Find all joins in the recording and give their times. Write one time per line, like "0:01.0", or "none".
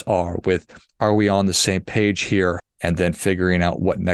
0:02.6